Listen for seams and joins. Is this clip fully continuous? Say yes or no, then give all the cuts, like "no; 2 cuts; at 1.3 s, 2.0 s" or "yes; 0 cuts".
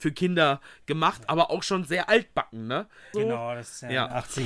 no; 1 cut; at 3.1 s